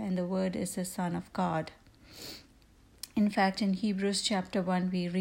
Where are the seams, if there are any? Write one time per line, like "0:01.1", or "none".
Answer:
none